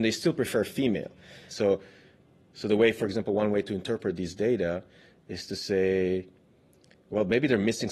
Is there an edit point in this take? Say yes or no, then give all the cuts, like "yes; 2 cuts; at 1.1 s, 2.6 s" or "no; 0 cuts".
yes; 1 cut; at 1.5 s